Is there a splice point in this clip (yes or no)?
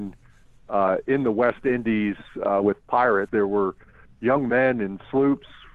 yes